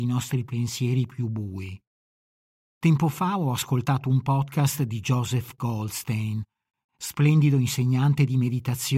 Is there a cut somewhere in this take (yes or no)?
yes